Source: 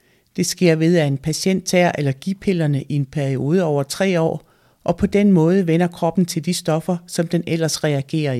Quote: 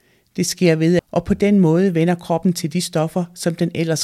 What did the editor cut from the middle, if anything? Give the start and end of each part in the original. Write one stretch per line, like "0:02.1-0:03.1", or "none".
0:01.0-0:04.7